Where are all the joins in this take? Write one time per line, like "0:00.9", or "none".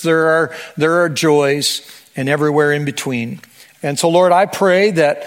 0:03.7